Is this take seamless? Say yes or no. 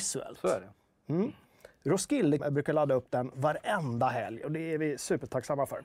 no